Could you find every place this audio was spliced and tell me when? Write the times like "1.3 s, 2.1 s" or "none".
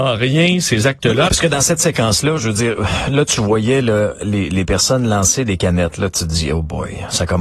1.3 s